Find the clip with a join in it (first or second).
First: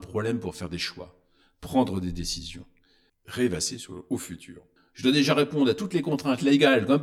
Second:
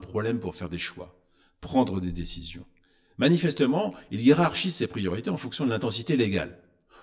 first